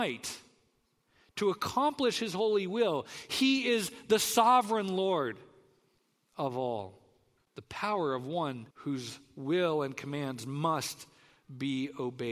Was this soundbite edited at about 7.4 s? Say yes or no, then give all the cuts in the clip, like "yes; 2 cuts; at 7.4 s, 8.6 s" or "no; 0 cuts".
yes; 2 cuts; at 7.4 s, 8.7 s